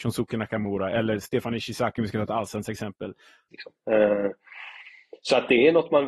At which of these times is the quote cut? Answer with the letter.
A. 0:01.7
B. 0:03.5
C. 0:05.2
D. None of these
B